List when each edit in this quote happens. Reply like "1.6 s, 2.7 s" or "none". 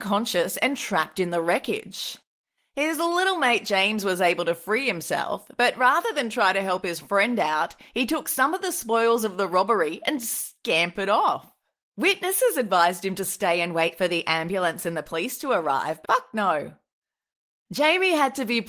16.0 s

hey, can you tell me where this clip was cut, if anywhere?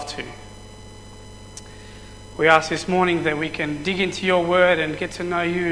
2.3 s

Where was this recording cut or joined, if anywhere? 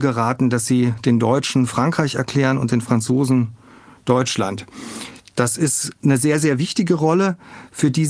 none

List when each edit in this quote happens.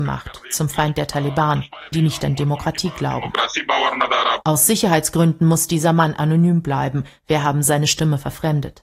1.9 s

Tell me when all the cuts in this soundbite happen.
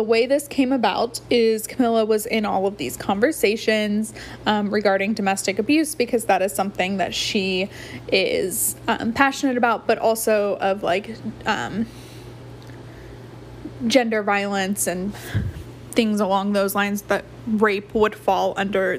none

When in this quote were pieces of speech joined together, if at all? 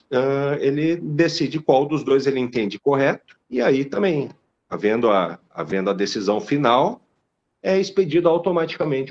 3.4 s

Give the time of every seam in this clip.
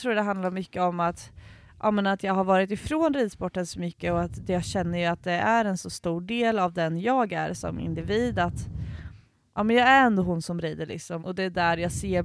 9.6 s, 11.2 s

